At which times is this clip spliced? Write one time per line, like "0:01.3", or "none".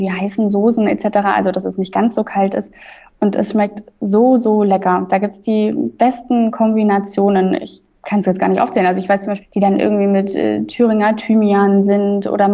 0:09.4

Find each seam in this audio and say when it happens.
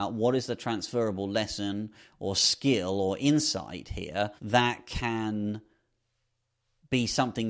0:04.4

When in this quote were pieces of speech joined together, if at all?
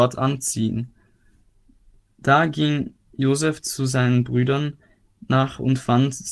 0:03.0

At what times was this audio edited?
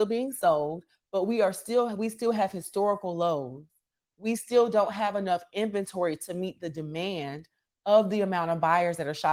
none

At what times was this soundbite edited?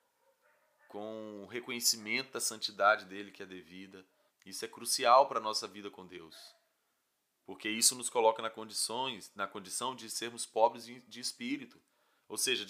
0:04.3

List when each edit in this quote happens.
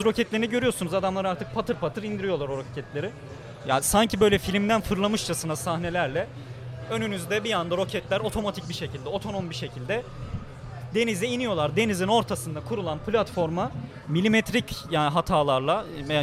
none

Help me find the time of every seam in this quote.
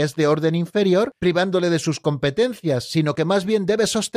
0:01.2

